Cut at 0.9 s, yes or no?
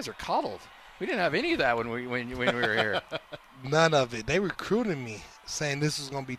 no